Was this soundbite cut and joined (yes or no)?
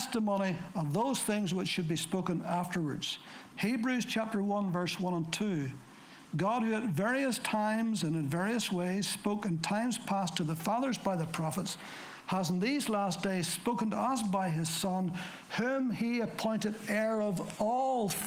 yes